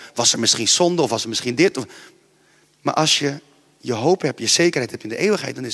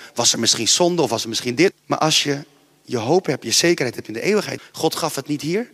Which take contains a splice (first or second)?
second